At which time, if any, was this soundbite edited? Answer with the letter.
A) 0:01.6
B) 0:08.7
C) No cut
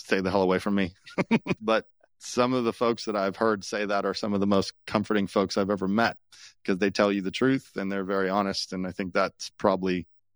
A